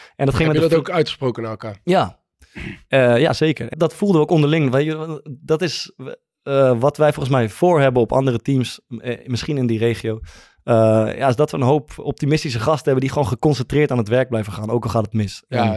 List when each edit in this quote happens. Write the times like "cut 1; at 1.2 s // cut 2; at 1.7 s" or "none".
cut 1; at 3.7 s